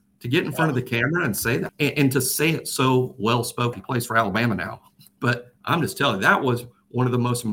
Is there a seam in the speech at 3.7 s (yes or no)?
yes